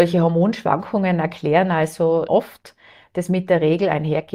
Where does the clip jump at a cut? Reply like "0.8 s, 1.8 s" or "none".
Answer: 2.3 s